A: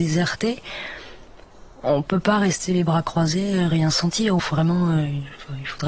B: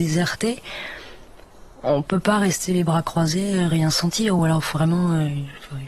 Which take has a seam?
A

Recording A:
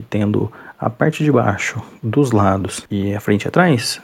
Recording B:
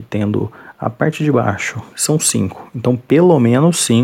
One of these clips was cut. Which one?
B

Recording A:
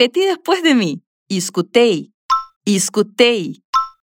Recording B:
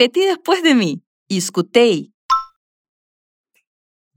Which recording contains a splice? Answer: A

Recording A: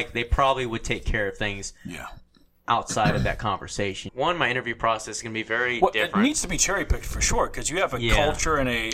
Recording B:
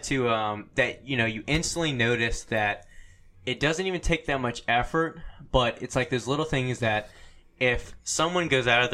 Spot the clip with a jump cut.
A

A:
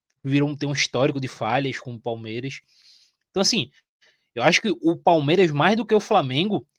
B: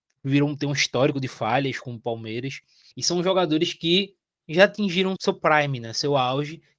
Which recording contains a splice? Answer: B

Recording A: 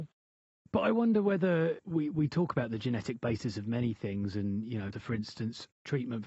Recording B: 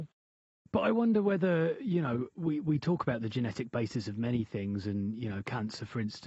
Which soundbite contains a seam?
A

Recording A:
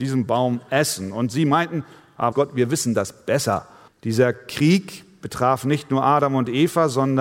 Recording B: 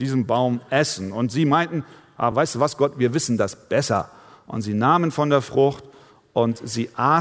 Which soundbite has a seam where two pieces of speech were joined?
A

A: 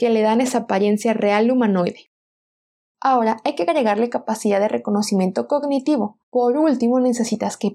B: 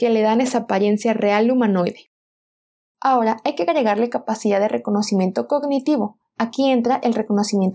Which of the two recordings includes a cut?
A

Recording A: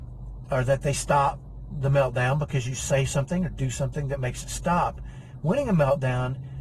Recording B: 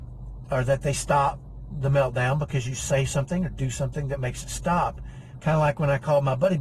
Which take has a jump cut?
B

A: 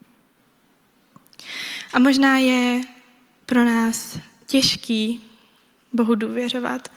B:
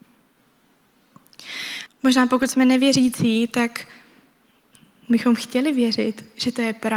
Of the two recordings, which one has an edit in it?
B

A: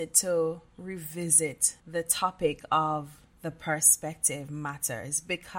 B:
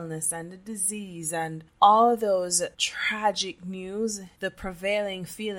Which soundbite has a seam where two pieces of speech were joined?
B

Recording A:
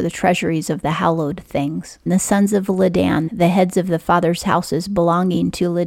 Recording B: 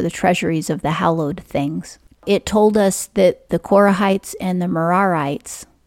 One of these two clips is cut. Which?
A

